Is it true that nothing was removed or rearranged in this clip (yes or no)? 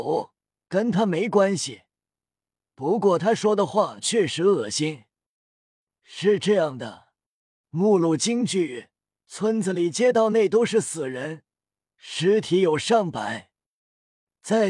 no